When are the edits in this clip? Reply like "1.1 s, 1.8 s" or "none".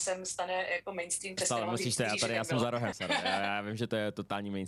1.4 s, 2.9 s

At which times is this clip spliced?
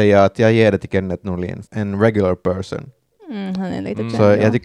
1.6 s, 3.1 s

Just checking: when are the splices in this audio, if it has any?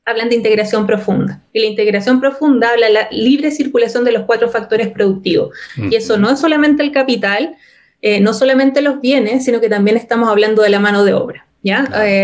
none

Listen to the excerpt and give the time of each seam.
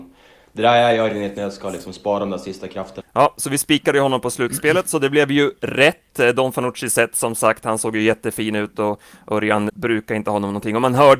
3.0 s, 9.7 s

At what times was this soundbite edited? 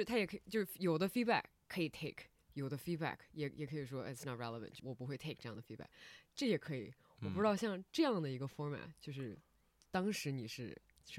4.8 s

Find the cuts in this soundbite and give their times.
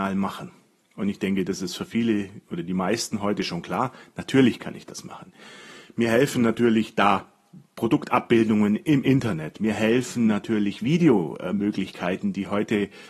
none

